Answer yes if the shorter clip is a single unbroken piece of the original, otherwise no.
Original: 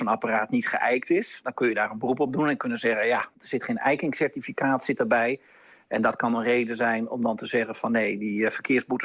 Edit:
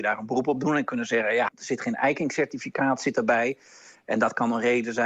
no